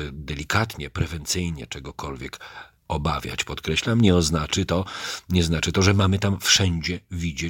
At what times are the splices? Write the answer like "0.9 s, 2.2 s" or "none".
none